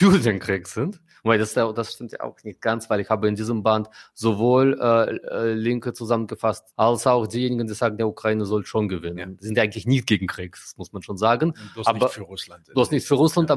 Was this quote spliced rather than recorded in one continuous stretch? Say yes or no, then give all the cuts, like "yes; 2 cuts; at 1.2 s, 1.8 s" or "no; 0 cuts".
yes; 1 cut; at 6.7 s